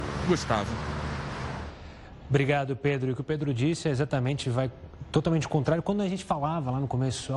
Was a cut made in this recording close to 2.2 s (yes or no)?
no